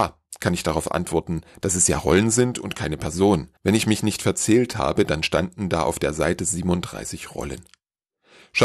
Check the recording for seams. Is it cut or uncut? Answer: cut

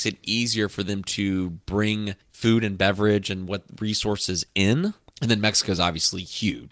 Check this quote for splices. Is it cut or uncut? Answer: cut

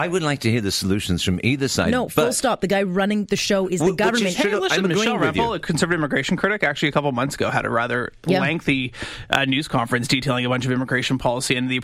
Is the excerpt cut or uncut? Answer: uncut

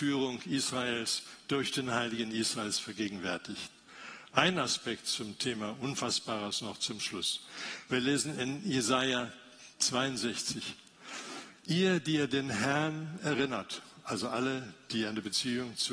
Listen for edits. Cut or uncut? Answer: uncut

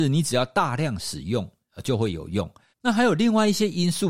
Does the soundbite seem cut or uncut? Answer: cut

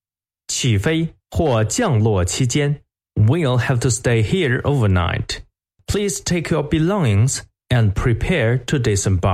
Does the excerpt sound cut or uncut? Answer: cut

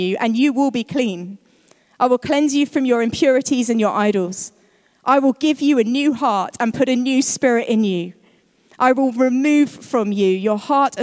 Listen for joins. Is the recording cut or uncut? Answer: uncut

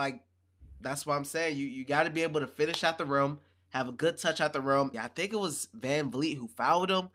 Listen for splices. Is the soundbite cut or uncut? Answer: cut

